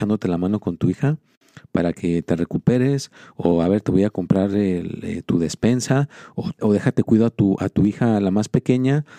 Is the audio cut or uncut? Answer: cut